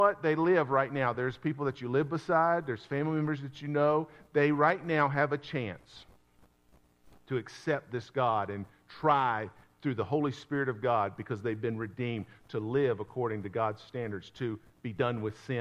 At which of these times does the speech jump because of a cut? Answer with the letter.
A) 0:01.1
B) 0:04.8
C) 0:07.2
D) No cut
D